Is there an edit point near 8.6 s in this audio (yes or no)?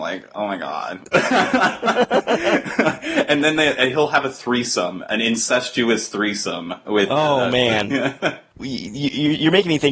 no